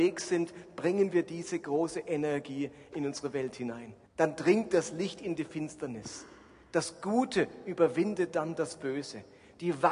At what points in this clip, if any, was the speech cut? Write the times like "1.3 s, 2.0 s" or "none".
4.1 s